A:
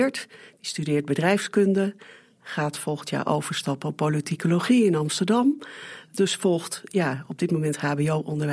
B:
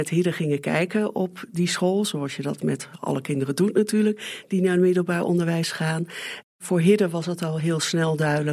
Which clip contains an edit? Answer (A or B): B